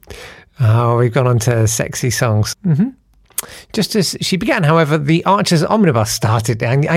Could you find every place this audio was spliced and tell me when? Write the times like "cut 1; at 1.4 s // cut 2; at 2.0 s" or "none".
cut 1; at 2.5 s

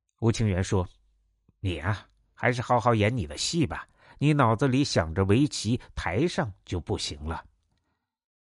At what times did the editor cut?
none

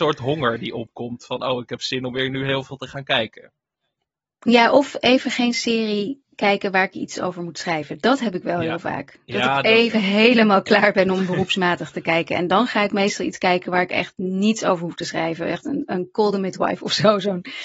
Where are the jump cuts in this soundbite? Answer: none

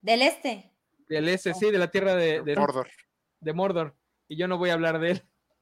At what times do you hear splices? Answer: cut 1; at 2.6 s

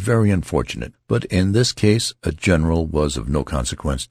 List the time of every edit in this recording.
cut 1; at 0.9 s

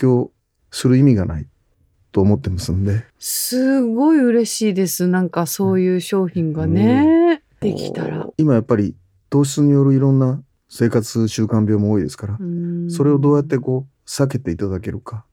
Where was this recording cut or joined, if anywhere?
cut 1; at 3.1 s // cut 2; at 8.3 s

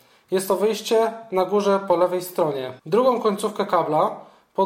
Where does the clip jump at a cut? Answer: cut 1; at 2.8 s

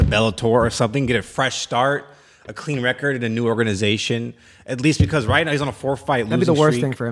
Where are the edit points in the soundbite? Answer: none

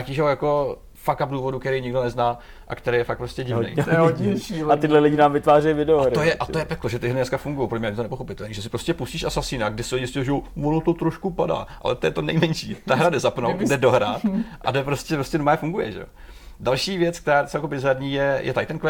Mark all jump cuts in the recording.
none

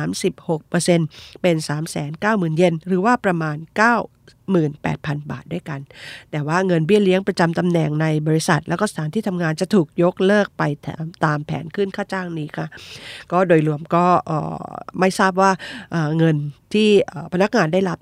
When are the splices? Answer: none

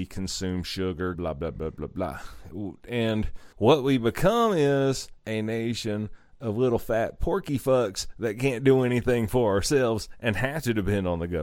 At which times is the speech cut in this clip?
cut 1; at 1.1 s // cut 2; at 3.5 s

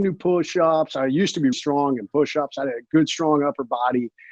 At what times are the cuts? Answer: cut 1; at 1.5 s

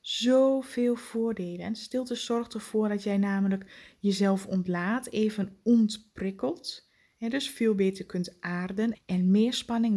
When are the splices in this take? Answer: cut 1; at 8.9 s

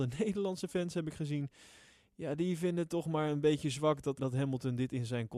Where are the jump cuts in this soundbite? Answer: cut 1; at 4.2 s

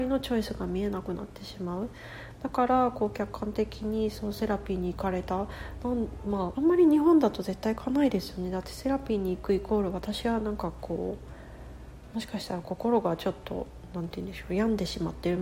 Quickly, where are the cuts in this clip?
cut 1; at 6.5 s

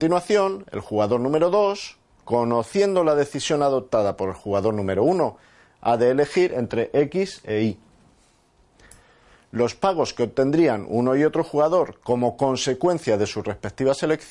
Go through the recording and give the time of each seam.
none

